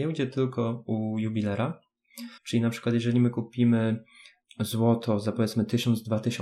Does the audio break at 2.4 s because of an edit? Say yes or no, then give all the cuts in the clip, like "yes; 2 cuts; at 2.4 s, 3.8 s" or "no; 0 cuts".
yes; 2 cuts; at 2.4 s, 4.4 s